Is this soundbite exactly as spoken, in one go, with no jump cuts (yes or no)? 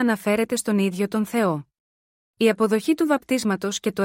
no